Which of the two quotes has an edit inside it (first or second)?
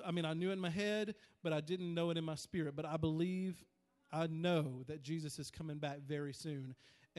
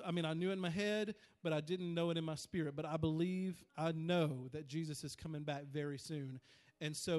second